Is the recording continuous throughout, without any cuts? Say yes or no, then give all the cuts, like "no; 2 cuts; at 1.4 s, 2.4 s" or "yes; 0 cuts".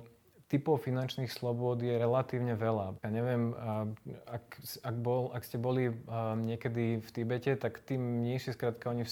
no; 1 cut; at 3.0 s